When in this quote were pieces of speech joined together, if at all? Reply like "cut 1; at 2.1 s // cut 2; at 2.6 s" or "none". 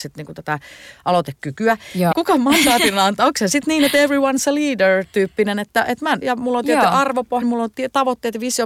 cut 1; at 2.1 s // cut 2; at 6.2 s // cut 3; at 7.4 s